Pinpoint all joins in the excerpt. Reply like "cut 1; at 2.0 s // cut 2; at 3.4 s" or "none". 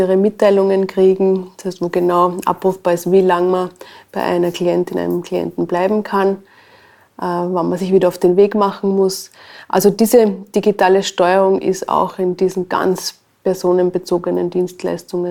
none